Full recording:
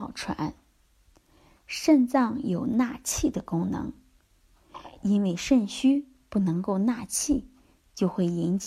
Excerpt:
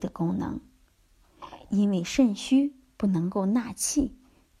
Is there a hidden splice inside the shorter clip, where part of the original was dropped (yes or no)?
no